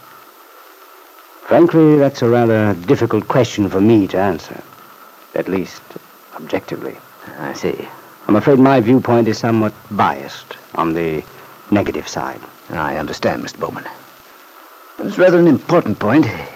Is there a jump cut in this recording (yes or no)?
no